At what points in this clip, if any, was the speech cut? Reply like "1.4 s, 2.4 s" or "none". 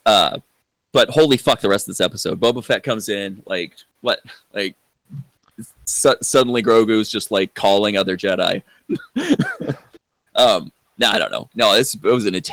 8.8 s, 11.5 s